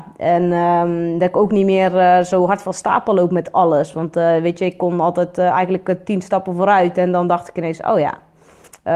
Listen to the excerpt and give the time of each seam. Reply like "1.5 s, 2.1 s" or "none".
none